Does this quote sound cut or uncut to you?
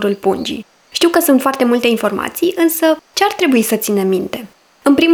uncut